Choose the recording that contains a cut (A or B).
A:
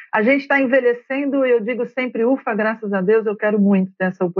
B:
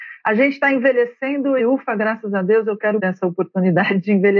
B